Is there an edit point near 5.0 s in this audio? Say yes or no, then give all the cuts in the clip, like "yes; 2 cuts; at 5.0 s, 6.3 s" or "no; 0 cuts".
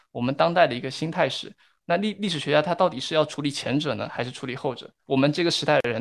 yes; 1 cut; at 5.0 s